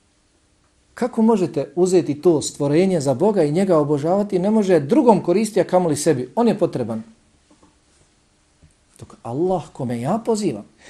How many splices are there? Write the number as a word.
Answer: zero